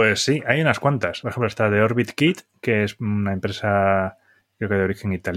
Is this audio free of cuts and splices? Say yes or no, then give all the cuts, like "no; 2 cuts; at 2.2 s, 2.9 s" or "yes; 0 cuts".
yes; 0 cuts